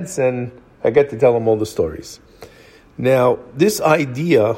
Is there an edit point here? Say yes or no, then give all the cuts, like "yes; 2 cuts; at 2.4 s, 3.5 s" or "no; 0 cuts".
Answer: no; 0 cuts